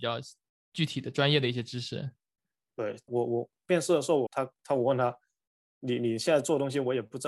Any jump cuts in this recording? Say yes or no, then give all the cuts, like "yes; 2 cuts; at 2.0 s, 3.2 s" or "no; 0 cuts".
yes; 2 cuts; at 3.1 s, 4.3 s